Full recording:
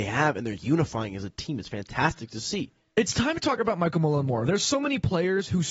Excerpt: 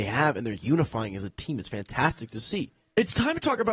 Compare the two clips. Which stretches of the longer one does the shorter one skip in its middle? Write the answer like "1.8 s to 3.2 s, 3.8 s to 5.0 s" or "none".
none